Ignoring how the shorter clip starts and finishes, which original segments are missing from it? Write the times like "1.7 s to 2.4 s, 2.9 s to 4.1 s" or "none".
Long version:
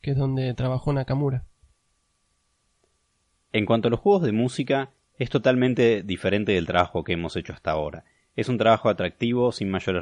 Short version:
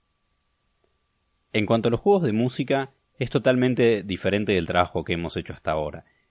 none